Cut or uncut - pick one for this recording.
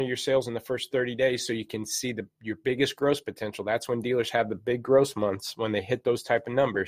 uncut